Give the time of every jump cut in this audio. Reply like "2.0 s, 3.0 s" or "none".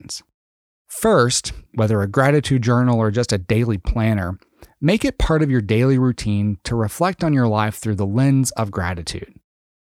1.7 s